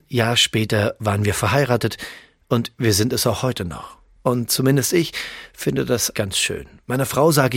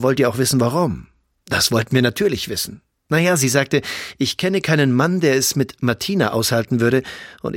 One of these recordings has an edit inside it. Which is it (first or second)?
first